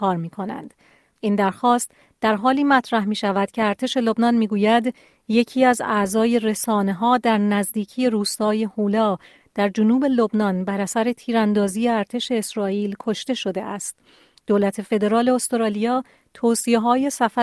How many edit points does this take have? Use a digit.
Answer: 1